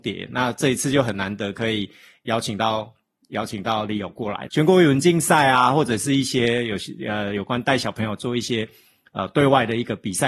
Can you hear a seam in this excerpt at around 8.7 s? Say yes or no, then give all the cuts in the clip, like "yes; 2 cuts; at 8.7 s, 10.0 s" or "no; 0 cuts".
no; 1 cut; at 4.5 s